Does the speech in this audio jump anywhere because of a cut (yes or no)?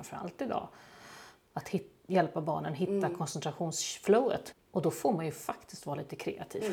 yes